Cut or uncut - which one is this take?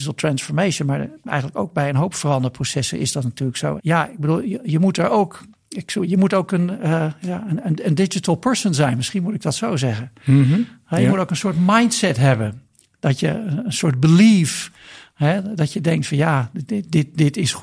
cut